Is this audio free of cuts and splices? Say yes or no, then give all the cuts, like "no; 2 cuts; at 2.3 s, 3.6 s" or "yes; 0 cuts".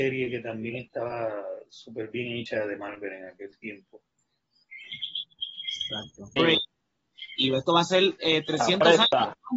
no; 1 cut; at 6.4 s